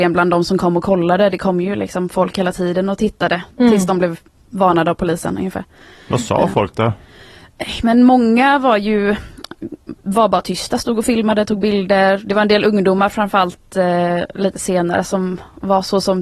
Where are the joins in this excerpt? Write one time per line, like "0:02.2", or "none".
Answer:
none